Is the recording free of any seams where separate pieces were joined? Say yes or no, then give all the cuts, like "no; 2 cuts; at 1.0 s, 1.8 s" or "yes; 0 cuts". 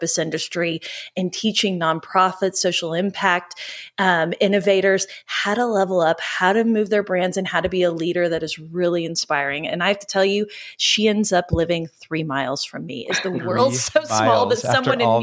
yes; 0 cuts